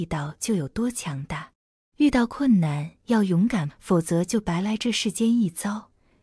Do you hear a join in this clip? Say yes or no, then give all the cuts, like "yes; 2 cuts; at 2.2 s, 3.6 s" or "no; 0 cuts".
yes; 2 cuts; at 1.9 s, 3.7 s